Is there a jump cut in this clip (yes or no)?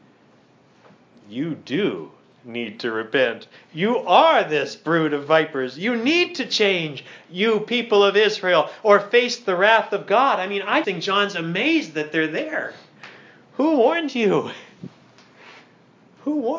yes